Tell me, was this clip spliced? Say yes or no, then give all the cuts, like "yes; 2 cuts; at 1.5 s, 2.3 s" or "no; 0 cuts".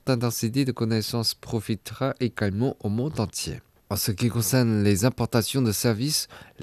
yes; 1 cut; at 3.8 s